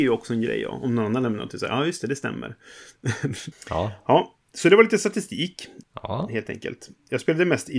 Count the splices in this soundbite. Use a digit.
1